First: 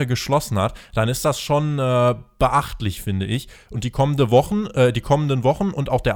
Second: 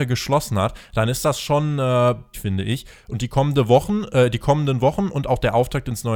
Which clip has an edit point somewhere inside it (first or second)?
second